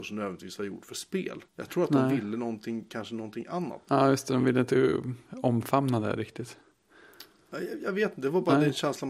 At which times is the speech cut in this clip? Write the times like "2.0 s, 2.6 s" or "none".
1.5 s, 3.9 s